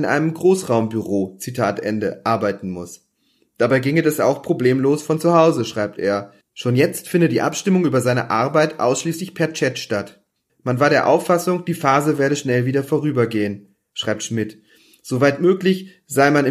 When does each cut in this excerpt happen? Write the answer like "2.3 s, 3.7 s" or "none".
10.5 s